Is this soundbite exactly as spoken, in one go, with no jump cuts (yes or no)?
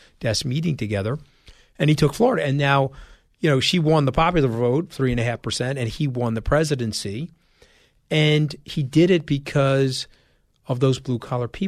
yes